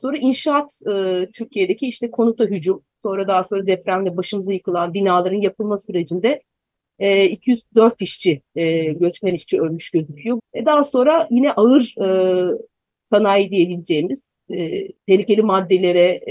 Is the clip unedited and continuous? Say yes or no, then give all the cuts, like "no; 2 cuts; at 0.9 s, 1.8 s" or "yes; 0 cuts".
no; 2 cuts; at 10.4 s, 14.9 s